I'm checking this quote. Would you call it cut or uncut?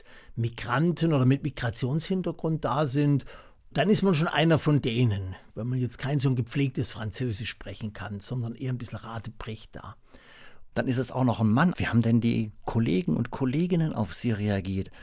cut